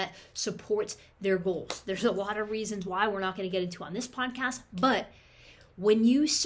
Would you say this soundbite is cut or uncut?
uncut